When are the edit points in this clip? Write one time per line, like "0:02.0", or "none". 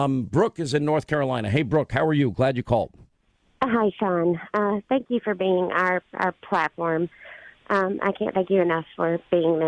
none